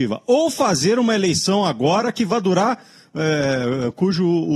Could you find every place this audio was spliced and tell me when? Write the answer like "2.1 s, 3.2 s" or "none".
none

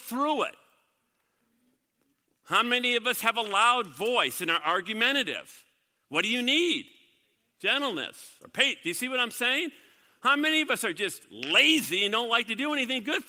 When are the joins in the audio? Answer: none

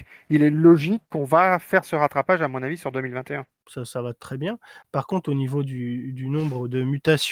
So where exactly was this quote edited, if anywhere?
3.6 s

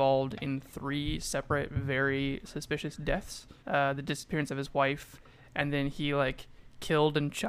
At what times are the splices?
3.6 s

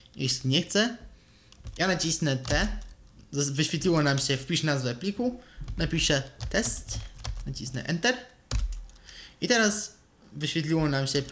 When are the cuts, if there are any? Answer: none

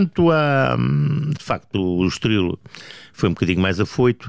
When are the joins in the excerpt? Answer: 1.4 s

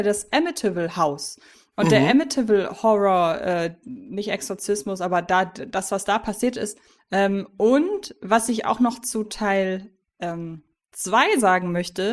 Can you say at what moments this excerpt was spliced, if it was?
7.0 s

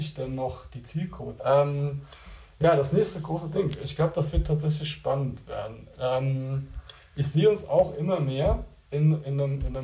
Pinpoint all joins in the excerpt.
1.4 s

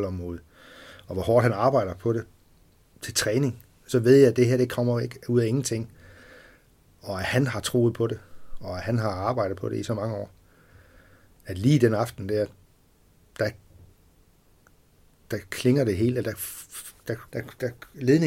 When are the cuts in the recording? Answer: 17.3 s

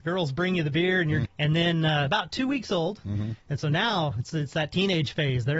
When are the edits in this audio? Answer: 1.2 s, 3.0 s

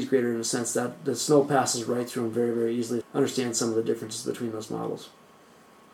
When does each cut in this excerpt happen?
3.0 s

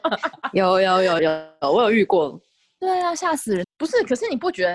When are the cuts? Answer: 1.2 s, 3.6 s

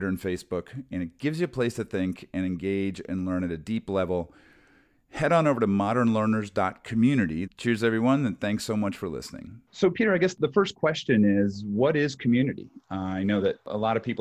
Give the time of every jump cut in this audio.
7.5 s, 9.7 s

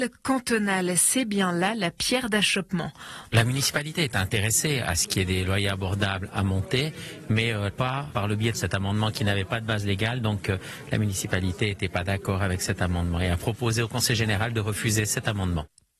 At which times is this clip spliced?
3.3 s

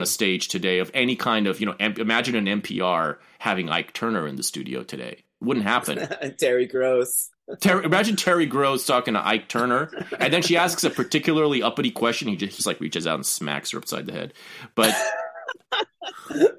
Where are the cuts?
12.6 s

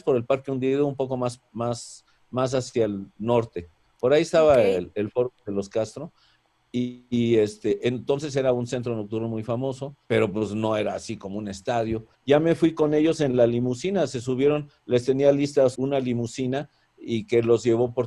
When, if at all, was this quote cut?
10.0 s, 12.1 s, 15.7 s

